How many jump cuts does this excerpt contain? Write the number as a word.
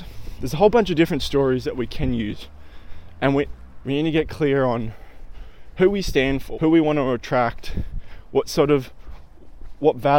two